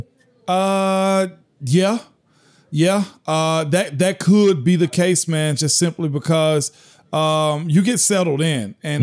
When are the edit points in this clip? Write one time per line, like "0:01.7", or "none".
none